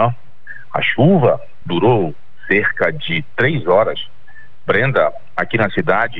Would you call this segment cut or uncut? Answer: cut